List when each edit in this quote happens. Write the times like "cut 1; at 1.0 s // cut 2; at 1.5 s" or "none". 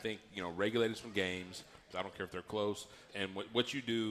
cut 1; at 1.9 s // cut 2; at 3.1 s

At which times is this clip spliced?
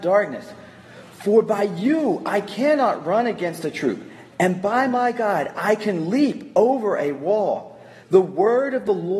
cut 1; at 8.0 s

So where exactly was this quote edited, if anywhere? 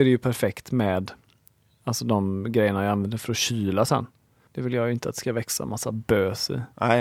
cut 1; at 4.5 s

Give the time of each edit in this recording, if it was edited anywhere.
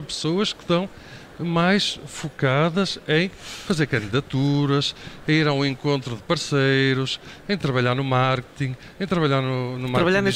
none

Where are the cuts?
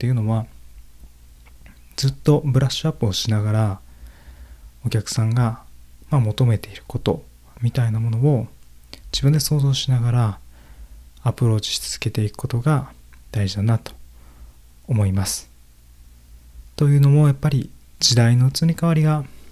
cut 1; at 16.7 s

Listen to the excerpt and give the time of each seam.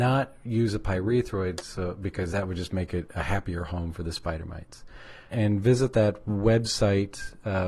cut 1; at 5.3 s

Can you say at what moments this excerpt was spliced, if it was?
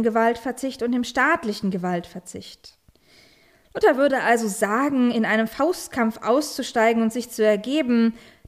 none

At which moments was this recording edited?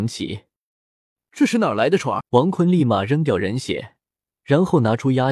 cut 1; at 2.2 s

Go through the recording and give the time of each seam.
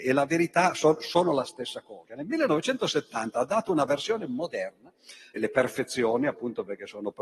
cut 1; at 2.1 s // cut 2; at 5.4 s

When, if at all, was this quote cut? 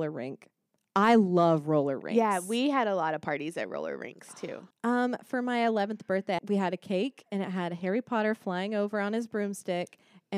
cut 1; at 4.7 s // cut 2; at 6.4 s

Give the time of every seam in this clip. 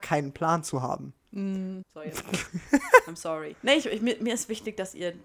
cut 1; at 1.8 s // cut 2; at 3.5 s

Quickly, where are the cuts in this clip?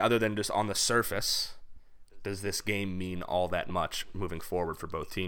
none

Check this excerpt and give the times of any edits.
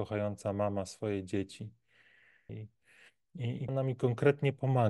cut 1; at 2.5 s // cut 2; at 3.7 s

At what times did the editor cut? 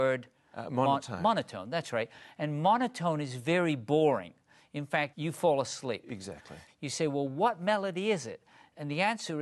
cut 1; at 5.1 s // cut 2; at 6.7 s

